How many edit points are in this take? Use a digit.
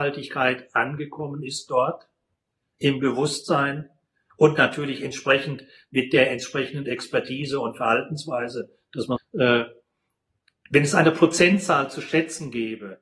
1